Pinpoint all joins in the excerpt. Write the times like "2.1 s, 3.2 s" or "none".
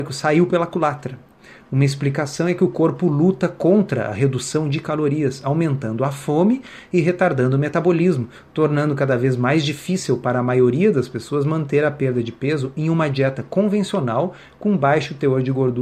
none

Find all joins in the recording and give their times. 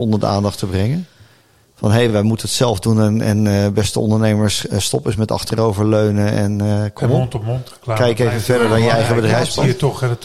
none

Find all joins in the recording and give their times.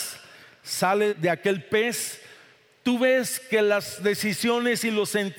1.1 s

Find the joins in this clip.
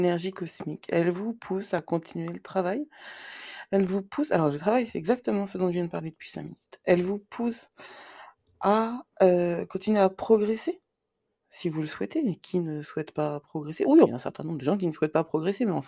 14.0 s

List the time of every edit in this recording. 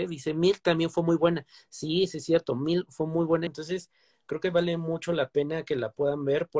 3.5 s

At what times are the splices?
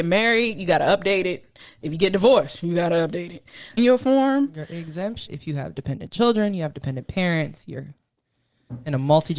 3.8 s, 5.3 s

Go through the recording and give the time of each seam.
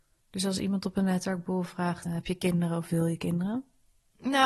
2.1 s

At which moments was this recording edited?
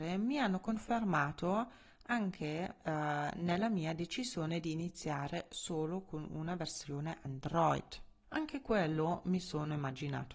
8.2 s

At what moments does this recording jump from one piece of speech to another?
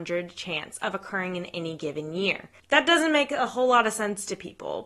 none

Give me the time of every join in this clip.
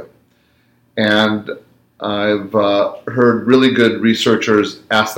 none

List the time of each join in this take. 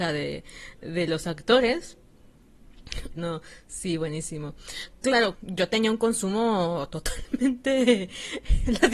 3.1 s, 5.3 s

